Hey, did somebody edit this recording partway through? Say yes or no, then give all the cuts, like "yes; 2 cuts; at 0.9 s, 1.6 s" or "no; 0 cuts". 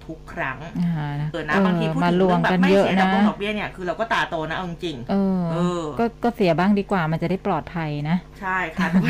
yes; 1 cut; at 1.3 s